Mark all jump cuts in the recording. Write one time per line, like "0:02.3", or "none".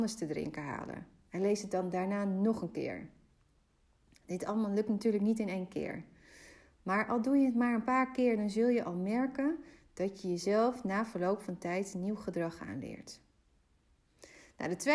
none

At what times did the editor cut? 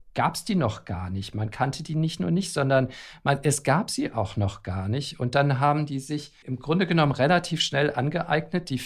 0:06.4

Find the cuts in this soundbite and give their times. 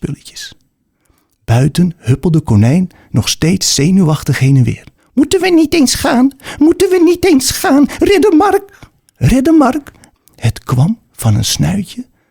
0:05.0
0:10.1

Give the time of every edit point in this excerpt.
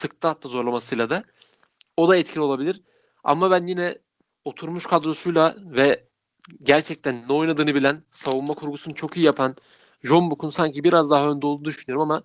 none

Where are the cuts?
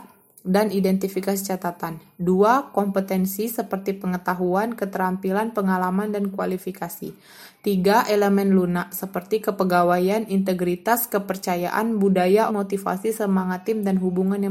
0:12.5

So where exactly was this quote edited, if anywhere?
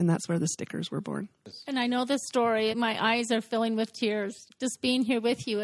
0:02.7
0:04.5

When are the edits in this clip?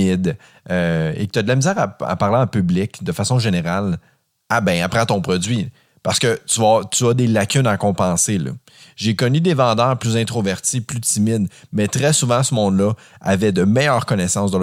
none

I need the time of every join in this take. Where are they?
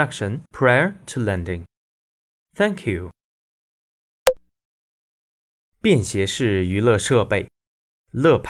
none

